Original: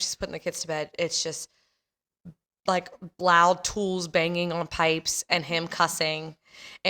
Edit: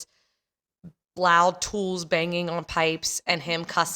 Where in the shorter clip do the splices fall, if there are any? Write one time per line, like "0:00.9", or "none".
0:01.1